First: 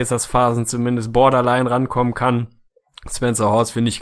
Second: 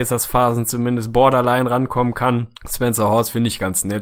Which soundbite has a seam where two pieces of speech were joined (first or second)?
second